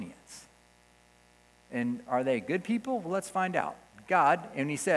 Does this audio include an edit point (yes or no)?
no